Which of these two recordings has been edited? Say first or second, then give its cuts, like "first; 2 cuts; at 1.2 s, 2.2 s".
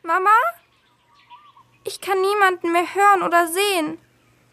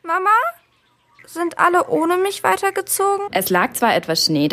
second; 2 cuts; at 1.2 s, 3.3 s